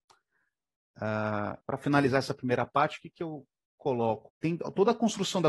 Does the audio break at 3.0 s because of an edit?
no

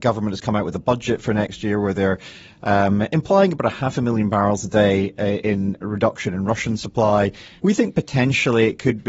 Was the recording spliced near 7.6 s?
yes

